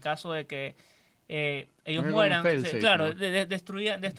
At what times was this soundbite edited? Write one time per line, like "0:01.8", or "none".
none